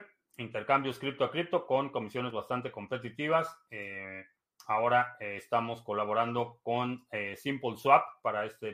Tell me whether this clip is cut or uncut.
uncut